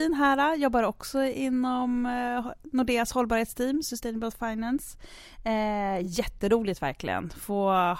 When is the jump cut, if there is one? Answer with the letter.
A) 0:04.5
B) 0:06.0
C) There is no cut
C